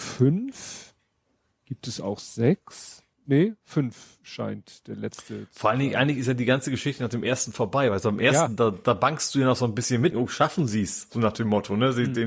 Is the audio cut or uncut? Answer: cut